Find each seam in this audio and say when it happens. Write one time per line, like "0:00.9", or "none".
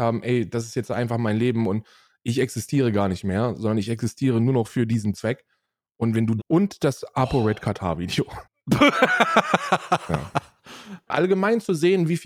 0:06.4
0:08.5
0:11.1